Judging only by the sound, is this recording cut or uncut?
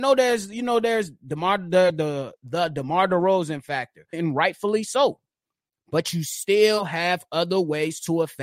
cut